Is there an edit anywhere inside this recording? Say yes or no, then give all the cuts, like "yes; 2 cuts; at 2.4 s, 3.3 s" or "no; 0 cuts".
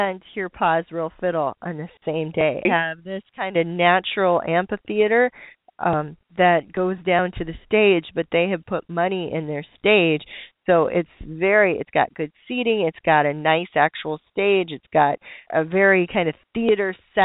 yes; 3 cuts; at 2.7 s, 6.2 s, 15.5 s